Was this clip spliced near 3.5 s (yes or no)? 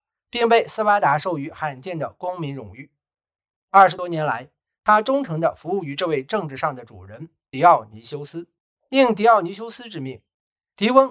no